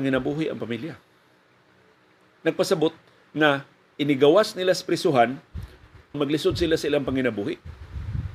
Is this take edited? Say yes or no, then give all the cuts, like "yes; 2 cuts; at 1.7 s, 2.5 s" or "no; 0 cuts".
yes; 2 cuts; at 2.4 s, 6.1 s